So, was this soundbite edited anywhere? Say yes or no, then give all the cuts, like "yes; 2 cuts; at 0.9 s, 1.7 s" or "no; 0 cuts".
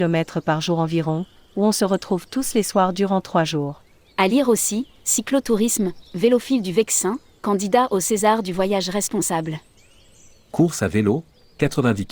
no; 0 cuts